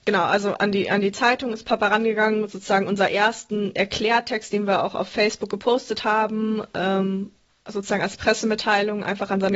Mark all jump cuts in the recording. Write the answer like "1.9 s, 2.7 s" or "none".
none